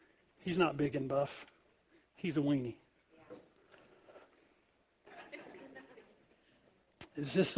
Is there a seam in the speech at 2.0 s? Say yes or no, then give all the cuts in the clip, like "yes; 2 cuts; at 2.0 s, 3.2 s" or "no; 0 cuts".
no; 1 cut; at 5.1 s